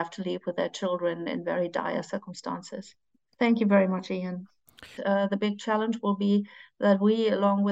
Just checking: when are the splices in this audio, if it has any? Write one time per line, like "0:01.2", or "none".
0:03.2
0:05.0